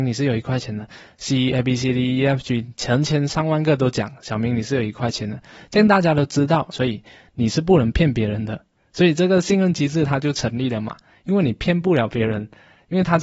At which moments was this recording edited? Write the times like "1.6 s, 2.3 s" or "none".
6.7 s